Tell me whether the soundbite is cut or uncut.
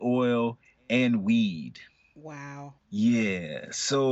cut